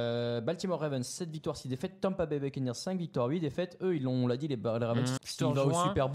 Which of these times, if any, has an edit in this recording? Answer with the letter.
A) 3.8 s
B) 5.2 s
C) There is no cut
B